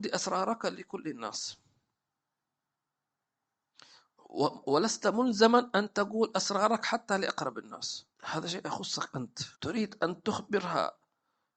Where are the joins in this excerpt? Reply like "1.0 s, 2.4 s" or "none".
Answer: 8.1 s, 9.5 s